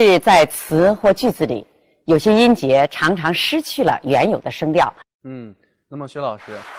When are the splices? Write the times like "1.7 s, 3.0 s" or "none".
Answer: 5.0 s